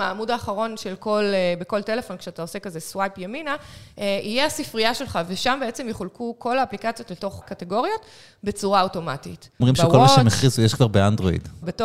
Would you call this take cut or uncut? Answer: cut